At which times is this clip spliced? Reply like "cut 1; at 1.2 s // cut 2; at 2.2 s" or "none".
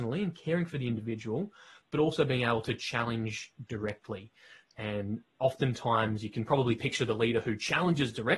none